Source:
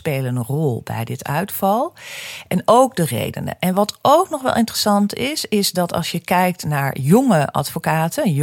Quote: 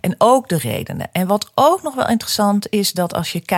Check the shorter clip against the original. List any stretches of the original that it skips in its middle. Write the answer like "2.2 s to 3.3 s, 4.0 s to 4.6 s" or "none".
5.1 s to 5.5 s